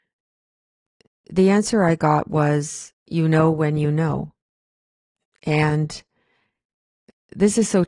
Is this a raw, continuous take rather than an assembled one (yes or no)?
no